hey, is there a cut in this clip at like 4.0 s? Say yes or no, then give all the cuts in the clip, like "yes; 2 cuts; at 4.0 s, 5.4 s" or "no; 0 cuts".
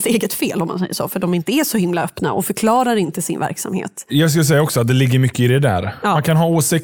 no; 0 cuts